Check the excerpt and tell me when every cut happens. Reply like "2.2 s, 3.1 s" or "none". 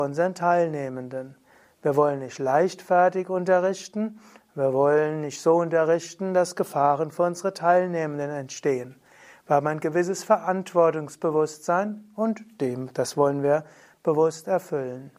none